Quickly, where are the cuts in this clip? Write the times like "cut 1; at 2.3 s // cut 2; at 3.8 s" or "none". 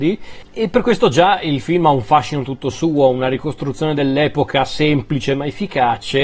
none

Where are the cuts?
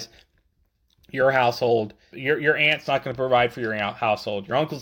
cut 1; at 2.1 s

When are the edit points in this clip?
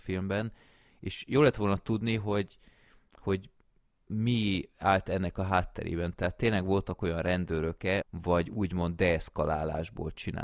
cut 1; at 8.0 s

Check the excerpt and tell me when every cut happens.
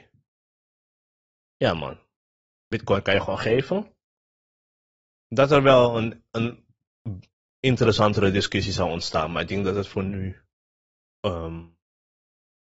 none

